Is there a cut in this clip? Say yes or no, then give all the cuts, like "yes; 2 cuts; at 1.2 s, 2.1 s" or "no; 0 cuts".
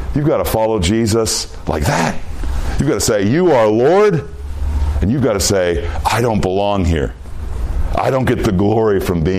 no; 0 cuts